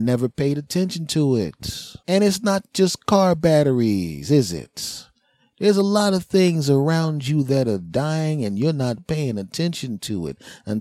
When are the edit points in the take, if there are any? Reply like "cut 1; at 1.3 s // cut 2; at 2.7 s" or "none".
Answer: cut 1; at 2.0 s